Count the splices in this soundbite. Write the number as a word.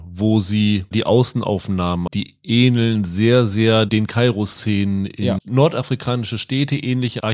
two